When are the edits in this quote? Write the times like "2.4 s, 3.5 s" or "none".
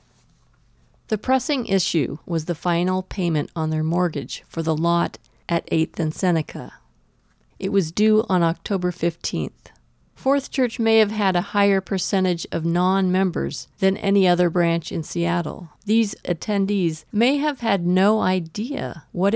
10.0 s, 15.8 s

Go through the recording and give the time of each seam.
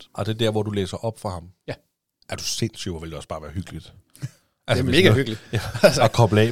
none

